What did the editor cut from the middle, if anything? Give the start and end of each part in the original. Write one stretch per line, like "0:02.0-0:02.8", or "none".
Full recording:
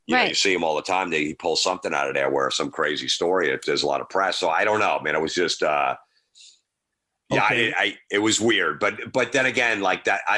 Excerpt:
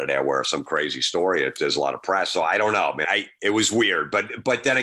0:05.1-0:07.7